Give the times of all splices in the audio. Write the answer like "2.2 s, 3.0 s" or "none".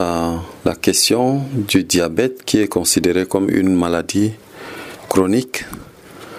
5.0 s